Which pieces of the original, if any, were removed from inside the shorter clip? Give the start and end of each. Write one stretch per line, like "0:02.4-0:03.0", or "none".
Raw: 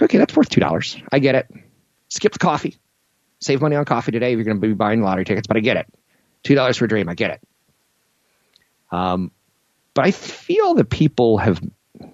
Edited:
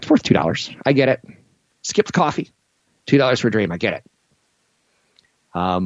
0:03.1-0:06.2

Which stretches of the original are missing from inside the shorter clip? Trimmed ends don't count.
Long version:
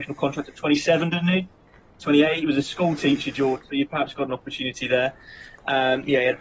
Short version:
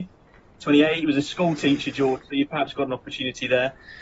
none

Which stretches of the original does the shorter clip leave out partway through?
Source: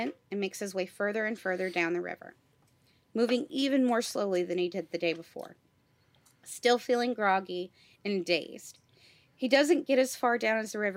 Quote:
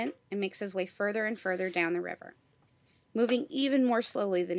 none

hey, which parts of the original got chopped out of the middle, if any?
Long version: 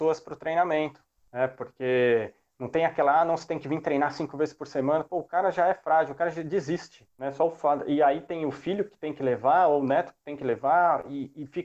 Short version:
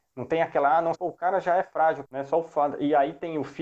0:03.4-0:05.1
0:06.2-0:07.1

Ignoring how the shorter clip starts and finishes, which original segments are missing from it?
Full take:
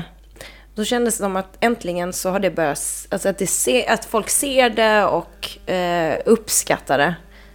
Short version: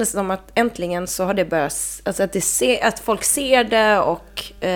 none

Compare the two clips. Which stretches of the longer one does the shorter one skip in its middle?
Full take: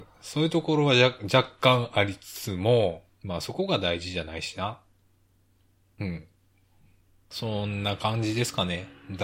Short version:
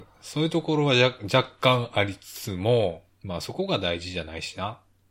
none

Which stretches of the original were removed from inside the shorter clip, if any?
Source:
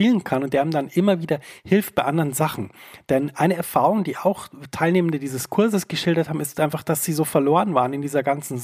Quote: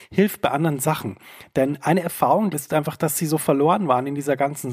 0:04.0-0:06.4

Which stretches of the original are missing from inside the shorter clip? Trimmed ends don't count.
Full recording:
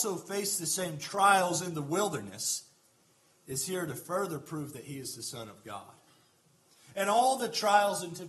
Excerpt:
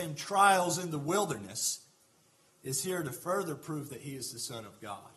none

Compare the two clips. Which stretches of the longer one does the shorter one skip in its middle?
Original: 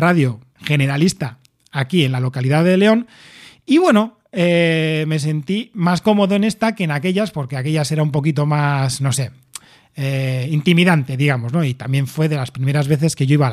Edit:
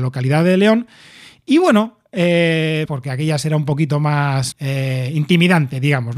0:05.1-0:07.3
0:09.0-0:09.9

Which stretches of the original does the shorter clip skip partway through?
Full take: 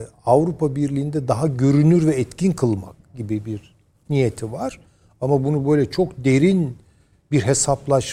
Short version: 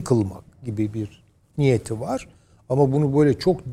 none

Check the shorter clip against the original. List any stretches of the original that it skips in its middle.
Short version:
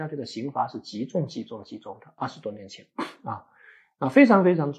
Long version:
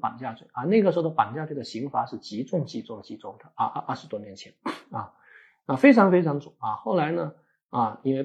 0:03.6-0:03.9

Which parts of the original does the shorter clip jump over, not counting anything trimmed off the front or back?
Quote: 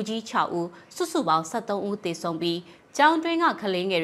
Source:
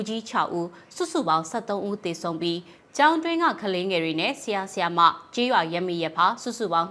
none

